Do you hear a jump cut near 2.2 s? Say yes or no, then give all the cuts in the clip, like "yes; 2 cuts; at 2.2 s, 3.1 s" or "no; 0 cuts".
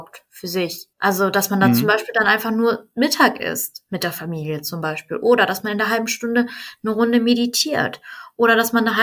no; 1 cut; at 0.9 s